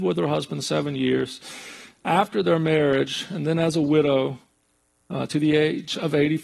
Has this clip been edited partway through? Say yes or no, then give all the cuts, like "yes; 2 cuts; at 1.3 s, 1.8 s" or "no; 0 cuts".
no; 0 cuts